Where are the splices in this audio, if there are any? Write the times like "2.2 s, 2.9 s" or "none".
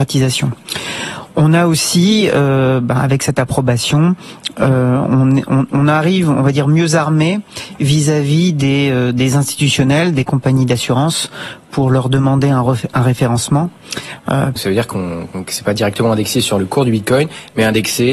14.6 s

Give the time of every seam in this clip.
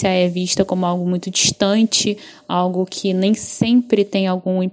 none

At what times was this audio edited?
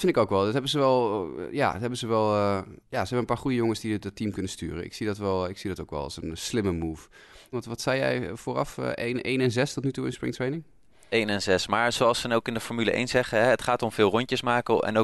2.8 s, 7.5 s

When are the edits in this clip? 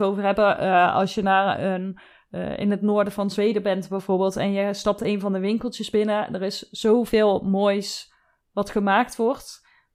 none

